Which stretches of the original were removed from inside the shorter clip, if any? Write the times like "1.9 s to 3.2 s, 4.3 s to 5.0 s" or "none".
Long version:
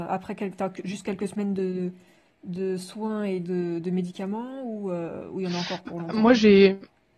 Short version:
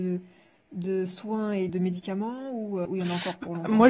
3.4 s to 3.8 s, 5.0 s to 5.3 s